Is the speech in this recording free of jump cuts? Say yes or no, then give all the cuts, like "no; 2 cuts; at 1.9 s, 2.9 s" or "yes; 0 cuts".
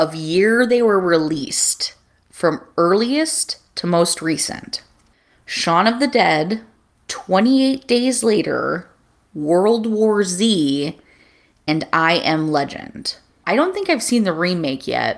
no; 2 cuts; at 7.0 s, 13.4 s